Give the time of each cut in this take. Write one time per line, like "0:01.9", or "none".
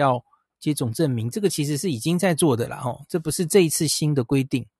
none